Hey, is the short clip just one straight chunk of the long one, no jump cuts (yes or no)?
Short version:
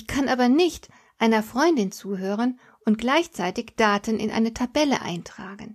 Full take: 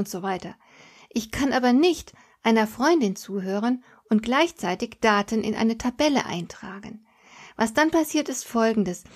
yes